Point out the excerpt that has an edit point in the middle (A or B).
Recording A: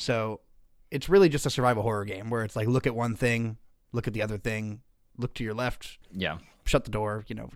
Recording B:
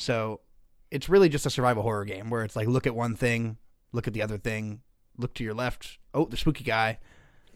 A